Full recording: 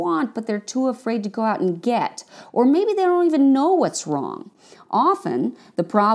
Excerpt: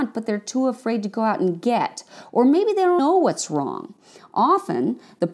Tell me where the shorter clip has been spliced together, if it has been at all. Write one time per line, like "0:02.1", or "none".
0:03.0